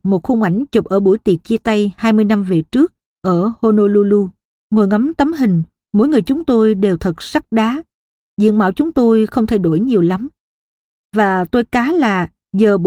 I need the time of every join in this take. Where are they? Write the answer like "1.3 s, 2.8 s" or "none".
4.5 s